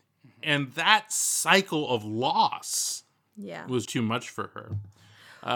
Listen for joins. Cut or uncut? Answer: cut